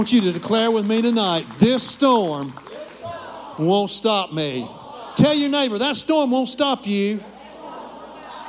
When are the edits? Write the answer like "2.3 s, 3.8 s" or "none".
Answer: none